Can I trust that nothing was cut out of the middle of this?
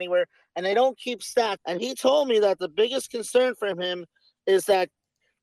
no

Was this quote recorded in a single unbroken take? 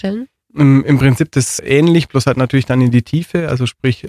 no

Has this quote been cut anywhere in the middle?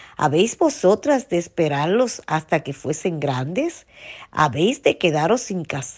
no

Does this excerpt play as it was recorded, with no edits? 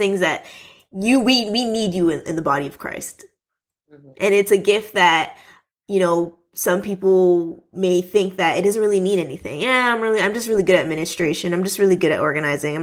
yes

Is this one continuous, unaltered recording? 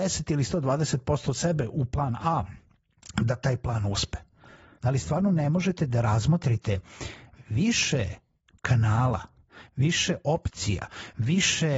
no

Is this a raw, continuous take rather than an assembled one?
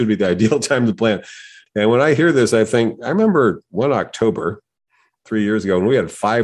no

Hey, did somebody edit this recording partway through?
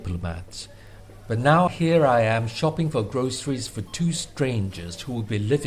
no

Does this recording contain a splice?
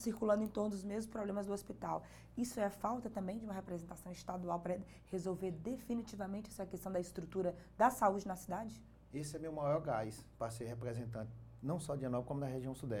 no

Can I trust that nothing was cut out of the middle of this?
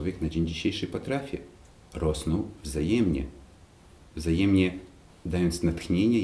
yes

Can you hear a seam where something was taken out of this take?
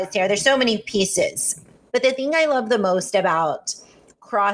yes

